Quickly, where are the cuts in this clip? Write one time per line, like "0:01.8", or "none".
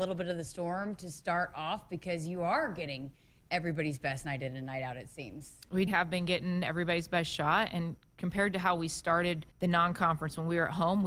0:05.9
0:09.5